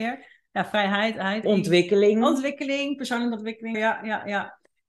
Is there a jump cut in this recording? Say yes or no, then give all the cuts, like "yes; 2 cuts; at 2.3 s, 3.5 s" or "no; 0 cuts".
yes; 2 cuts; at 1.4 s, 3.7 s